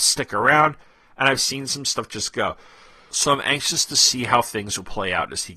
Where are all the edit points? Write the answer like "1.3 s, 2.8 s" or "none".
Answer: none